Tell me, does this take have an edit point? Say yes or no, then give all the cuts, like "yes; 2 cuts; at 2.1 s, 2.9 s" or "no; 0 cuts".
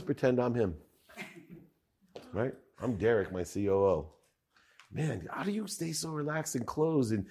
no; 0 cuts